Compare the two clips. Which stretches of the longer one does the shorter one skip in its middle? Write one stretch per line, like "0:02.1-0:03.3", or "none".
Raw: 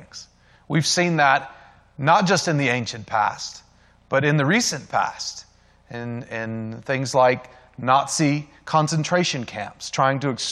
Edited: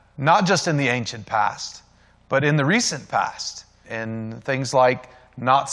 0:05.6-0:06.2